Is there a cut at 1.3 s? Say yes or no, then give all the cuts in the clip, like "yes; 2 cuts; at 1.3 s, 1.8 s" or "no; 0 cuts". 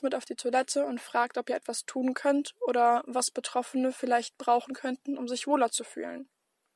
no; 0 cuts